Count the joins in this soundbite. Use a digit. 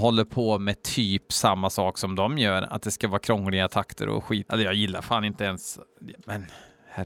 2